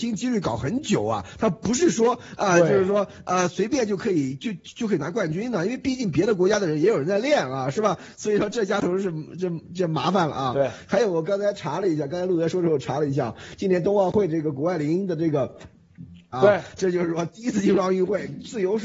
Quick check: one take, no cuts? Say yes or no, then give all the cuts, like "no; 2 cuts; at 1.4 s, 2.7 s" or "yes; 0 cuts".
no; 2 cuts; at 8.1 s, 16.3 s